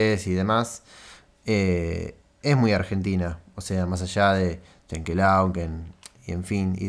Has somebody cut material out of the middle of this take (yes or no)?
no